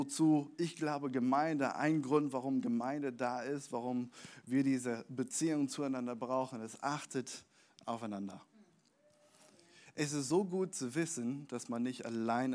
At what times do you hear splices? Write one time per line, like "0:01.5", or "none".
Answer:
none